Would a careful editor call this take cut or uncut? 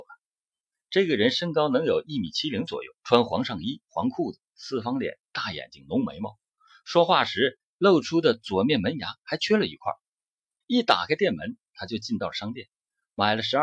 cut